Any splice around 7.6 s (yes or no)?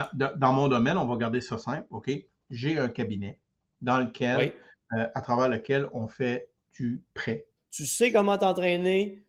yes